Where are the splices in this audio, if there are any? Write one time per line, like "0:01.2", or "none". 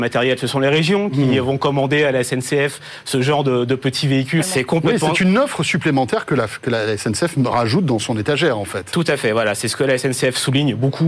0:04.4